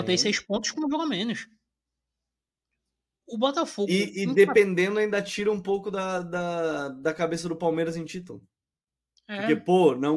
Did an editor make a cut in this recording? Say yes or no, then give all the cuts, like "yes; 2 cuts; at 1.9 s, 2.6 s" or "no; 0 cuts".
no; 0 cuts